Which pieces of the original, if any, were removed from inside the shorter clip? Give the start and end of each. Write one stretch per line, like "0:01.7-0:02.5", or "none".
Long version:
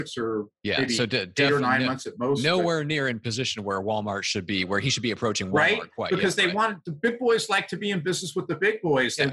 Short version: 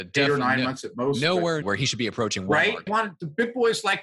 0:02.8-0:04.7
0:05.9-0:06.5